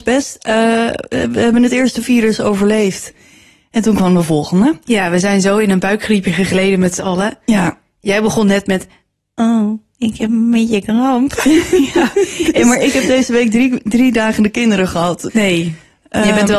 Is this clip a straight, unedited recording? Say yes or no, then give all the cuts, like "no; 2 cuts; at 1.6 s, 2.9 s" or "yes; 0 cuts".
no; 1 cut; at 15.3 s